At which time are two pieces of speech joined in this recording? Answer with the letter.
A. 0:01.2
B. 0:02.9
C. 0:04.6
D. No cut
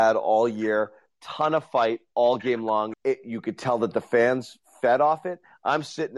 B